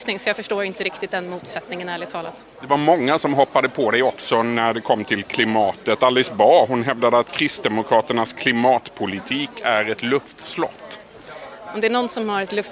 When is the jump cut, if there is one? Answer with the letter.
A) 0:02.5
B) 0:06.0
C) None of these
C